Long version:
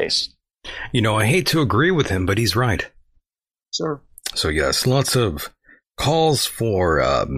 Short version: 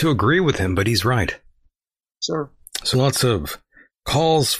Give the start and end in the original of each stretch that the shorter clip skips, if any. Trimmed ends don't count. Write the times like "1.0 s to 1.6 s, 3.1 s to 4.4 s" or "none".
4.4 s to 4.8 s